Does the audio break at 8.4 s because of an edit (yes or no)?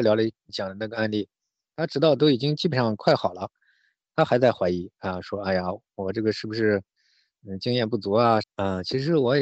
yes